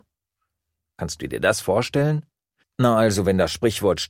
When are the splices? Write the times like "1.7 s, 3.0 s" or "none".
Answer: 2.6 s

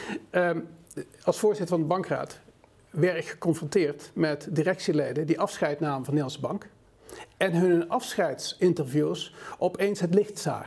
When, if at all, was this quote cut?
none

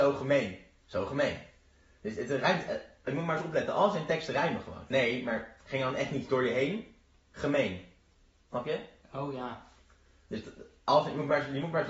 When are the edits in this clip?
4.9 s

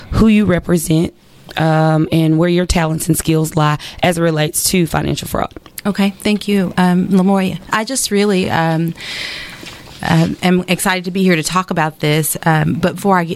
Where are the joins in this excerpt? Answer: none

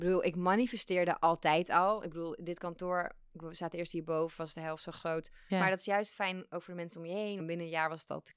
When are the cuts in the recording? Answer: 5.5 s, 7.4 s

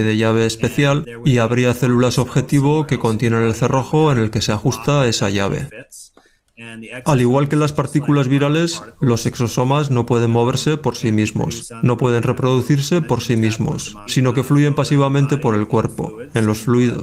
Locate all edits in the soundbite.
14.1 s

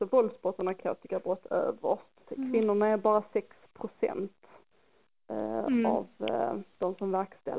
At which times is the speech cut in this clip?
2.2 s

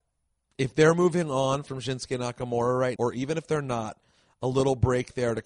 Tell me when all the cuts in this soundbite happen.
3.0 s

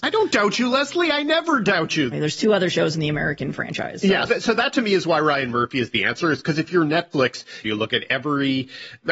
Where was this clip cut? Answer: 2.1 s, 4.3 s, 7.6 s

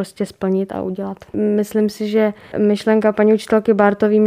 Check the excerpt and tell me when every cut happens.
1.3 s

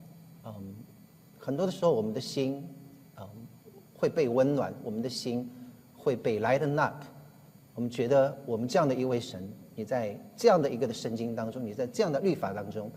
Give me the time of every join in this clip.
none

